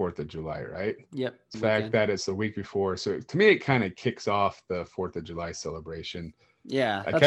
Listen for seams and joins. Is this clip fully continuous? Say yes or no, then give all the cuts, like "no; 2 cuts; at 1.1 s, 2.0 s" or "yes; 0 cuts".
no; 1 cut; at 1.5 s